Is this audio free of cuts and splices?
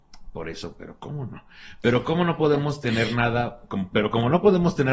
yes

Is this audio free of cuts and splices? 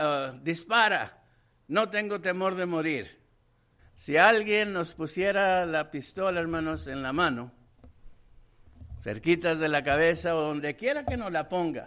no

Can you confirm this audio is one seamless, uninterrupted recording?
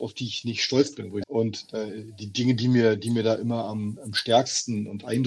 no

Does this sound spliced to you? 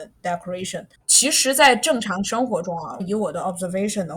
yes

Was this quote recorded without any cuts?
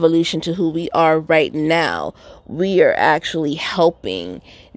yes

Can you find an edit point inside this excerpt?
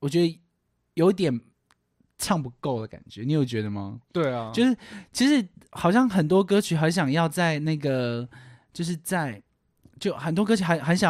no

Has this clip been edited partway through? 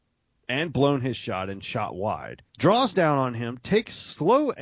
yes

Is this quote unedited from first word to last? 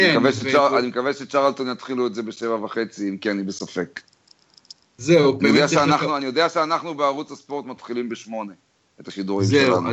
yes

